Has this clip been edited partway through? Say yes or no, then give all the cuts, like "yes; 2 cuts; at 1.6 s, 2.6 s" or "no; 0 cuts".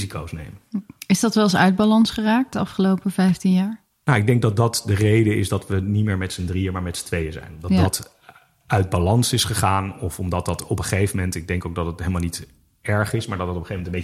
no; 0 cuts